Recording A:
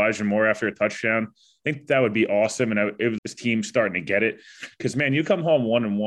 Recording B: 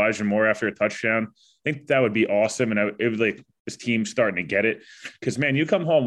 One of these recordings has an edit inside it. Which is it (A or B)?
A